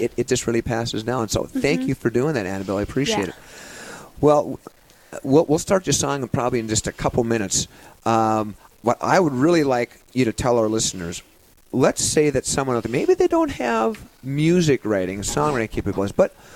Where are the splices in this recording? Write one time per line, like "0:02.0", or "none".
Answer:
none